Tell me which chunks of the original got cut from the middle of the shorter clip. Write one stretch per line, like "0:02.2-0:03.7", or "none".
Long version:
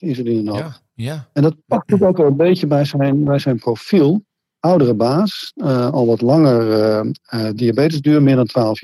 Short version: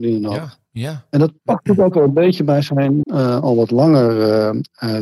0:03.3-0:05.5